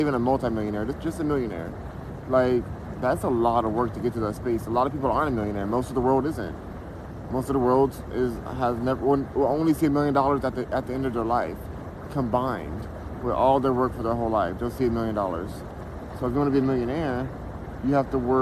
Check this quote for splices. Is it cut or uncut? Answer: uncut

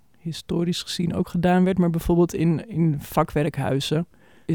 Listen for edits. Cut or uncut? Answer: uncut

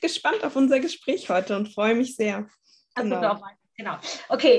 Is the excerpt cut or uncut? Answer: cut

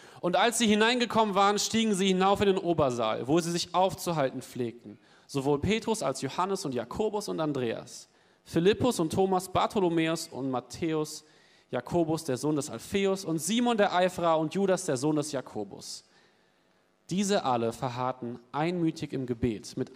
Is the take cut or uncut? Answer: uncut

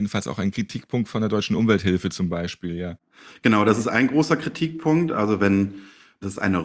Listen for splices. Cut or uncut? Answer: uncut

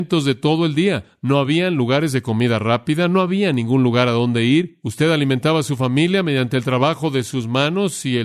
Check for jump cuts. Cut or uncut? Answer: uncut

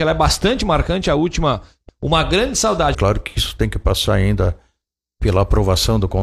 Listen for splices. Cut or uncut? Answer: cut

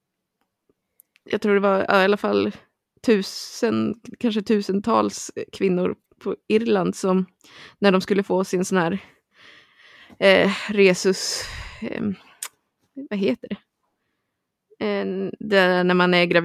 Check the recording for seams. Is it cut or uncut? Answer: uncut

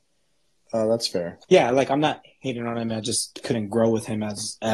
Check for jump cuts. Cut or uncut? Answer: cut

